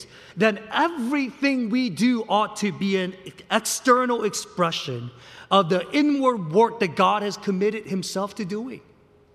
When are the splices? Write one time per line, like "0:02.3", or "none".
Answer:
none